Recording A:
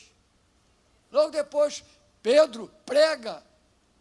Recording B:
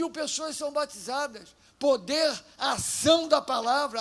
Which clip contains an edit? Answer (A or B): A